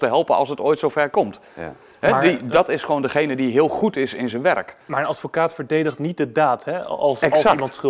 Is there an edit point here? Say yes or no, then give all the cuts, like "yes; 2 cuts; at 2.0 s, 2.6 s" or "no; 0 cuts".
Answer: no; 0 cuts